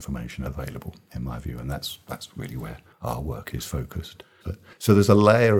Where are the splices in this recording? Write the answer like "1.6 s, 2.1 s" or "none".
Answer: 4.4 s